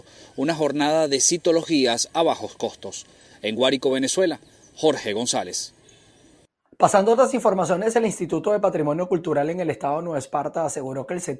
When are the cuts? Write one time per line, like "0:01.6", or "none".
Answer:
none

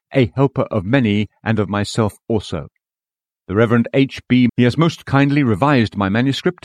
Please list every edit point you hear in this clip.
0:04.5

